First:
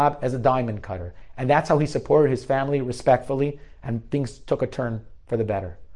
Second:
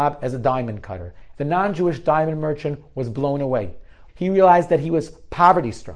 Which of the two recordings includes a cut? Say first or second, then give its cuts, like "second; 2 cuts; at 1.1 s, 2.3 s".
second; 2 cuts; at 1.3 s, 4.1 s